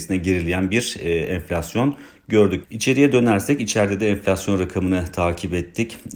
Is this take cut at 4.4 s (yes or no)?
no